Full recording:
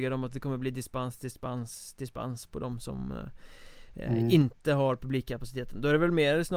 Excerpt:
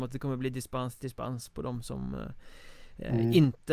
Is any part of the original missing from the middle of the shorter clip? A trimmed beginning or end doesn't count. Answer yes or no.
yes